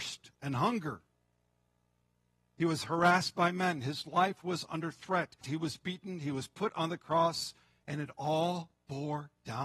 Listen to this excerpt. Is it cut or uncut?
cut